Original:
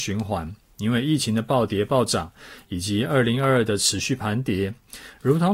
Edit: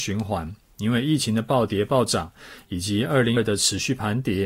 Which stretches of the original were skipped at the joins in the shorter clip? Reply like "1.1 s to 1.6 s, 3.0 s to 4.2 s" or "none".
3.4 s to 3.6 s